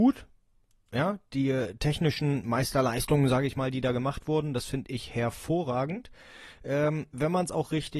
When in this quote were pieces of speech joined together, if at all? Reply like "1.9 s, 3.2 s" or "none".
none